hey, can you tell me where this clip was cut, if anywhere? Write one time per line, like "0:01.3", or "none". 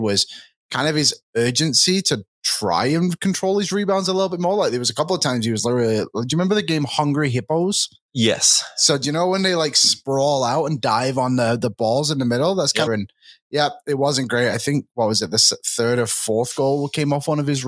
0:12.9